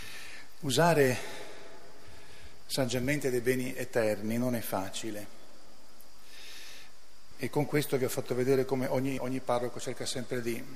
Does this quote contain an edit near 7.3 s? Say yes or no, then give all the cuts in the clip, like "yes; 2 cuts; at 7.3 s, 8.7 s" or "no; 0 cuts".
yes; 2 cuts; at 7.3 s, 9.2 s